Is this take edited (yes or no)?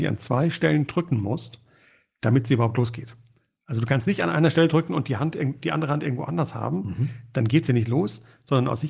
no